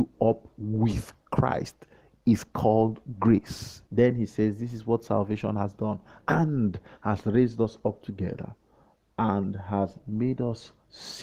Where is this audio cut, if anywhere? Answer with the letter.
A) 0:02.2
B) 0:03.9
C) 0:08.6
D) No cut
B